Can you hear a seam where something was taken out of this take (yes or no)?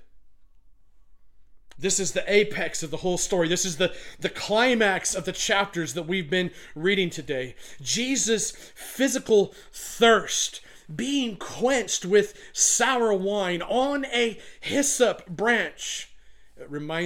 yes